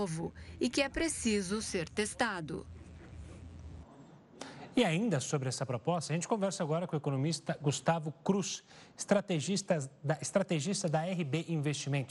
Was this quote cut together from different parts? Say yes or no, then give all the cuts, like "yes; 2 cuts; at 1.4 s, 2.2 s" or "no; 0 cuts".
no; 0 cuts